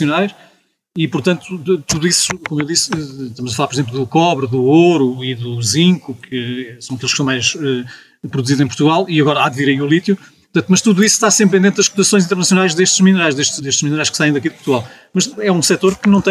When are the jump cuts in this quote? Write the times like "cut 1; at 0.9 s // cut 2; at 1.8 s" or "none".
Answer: cut 1; at 11.5 s // cut 2; at 13.6 s // cut 3; at 15.3 s